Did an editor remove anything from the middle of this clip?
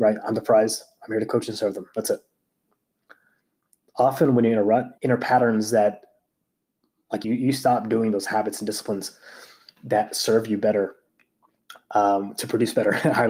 yes; 2 cuts; at 5.0 s, 7.2 s

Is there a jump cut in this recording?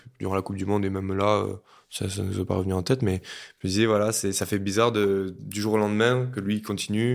no; 0 cuts

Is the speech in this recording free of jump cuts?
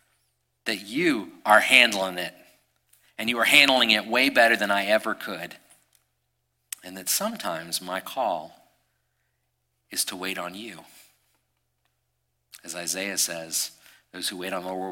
no; 1 cut; at 1.4 s

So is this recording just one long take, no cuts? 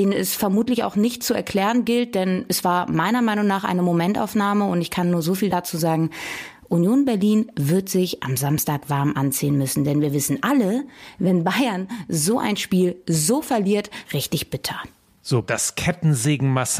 no; 2 cuts; at 14.0 s, 15.4 s

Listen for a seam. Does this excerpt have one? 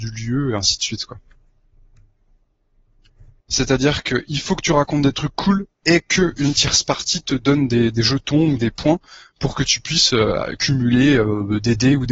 yes; 1 cut; at 3.4 s

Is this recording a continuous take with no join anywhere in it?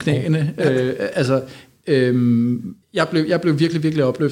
no; 1 cut; at 2.8 s

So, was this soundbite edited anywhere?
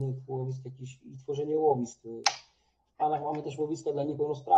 no; 0 cuts

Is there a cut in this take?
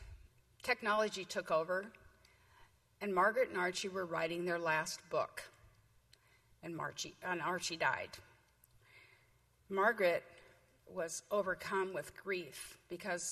no; 0 cuts

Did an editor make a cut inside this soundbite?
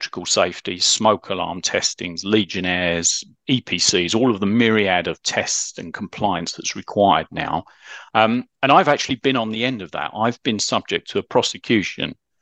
yes; 1 cut; at 8.1 s

